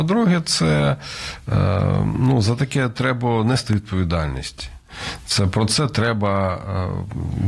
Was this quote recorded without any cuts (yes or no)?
yes